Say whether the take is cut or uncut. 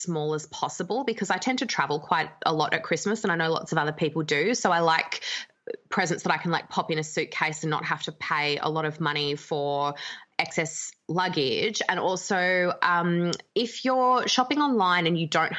uncut